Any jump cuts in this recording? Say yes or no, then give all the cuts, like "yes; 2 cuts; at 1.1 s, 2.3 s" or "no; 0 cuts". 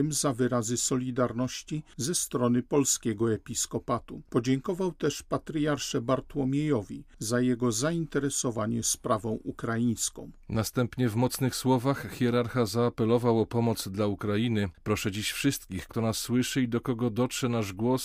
yes; 2 cuts; at 14.7 s, 15.9 s